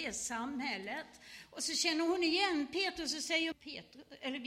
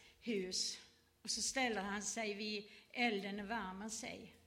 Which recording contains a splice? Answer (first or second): first